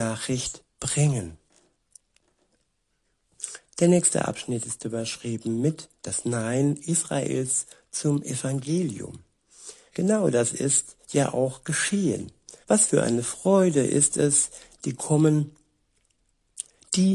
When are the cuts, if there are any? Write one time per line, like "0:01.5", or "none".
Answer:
0:09.9
0:12.6